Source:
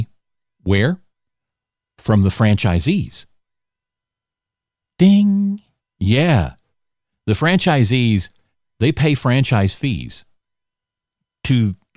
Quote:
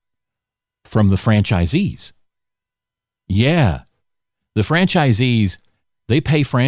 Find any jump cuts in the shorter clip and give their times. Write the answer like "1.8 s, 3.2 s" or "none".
3.2 s